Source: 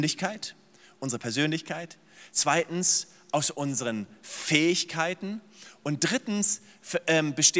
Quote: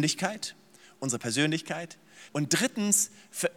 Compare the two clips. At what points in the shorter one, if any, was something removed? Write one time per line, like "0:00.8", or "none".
0:02.3